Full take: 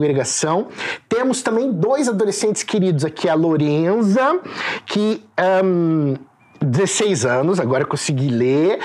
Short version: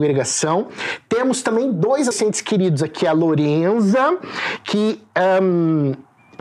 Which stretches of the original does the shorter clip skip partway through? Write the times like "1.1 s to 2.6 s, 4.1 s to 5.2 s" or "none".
2.1 s to 2.3 s